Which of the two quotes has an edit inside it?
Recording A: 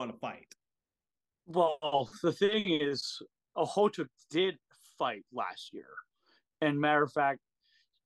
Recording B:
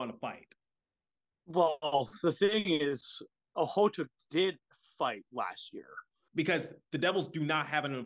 B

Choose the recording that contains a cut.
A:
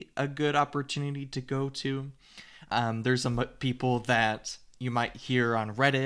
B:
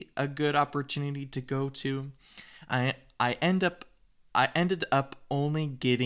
A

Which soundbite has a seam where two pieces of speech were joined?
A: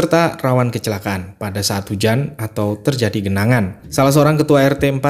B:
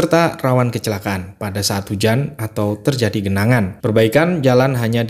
B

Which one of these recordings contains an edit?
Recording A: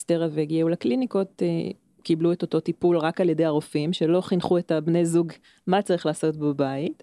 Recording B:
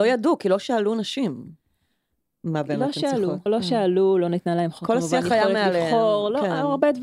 B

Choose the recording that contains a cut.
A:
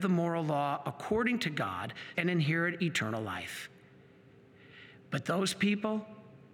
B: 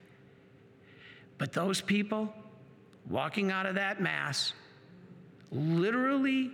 A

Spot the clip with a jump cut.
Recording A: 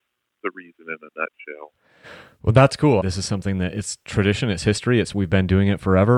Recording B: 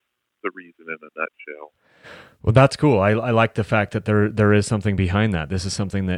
A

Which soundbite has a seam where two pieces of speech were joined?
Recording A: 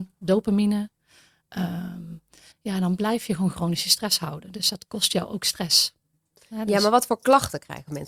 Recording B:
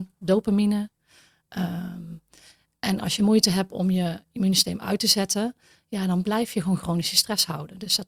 A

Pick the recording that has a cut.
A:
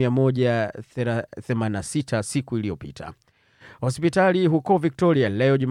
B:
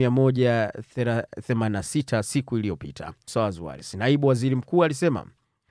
B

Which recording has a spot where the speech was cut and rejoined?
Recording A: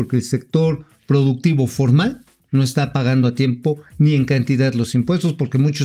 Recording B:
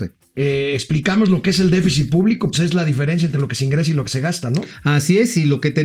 B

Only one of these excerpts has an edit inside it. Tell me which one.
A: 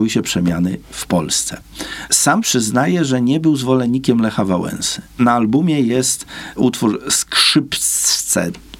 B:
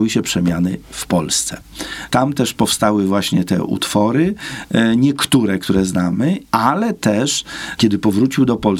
B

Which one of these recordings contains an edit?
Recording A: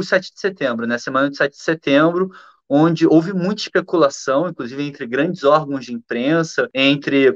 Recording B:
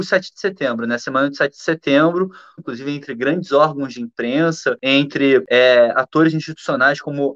B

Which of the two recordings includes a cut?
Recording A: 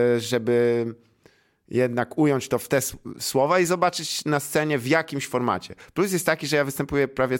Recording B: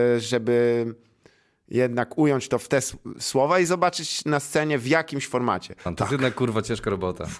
B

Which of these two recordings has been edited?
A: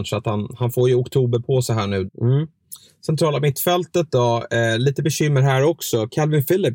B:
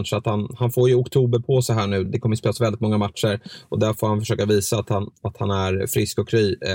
A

